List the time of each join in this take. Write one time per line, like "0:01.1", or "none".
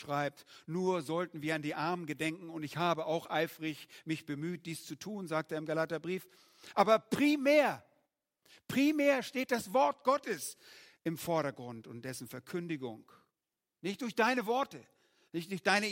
0:13.7